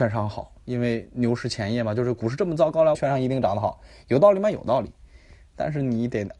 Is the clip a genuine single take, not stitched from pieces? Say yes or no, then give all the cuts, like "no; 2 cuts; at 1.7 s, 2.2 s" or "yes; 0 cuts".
no; 1 cut; at 2.9 s